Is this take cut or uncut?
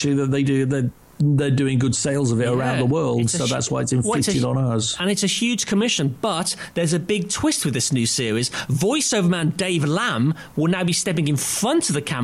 uncut